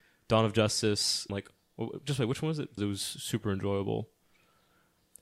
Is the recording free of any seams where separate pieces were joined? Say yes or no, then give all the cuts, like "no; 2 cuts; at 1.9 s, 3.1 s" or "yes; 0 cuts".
no; 2 cuts; at 1.3 s, 2.8 s